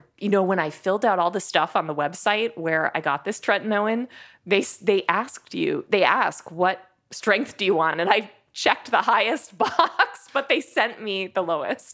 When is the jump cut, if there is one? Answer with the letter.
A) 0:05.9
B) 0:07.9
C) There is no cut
C